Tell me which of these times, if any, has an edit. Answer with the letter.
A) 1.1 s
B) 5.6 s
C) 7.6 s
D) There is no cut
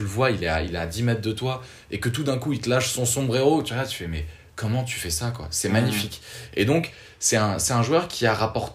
D